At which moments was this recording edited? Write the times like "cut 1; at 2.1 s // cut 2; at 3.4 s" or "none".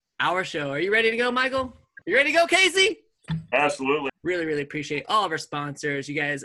cut 1; at 2.0 s // cut 2; at 4.1 s